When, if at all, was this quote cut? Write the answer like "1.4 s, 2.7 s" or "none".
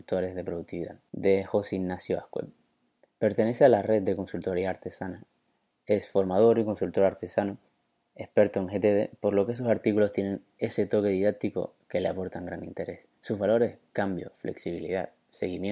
none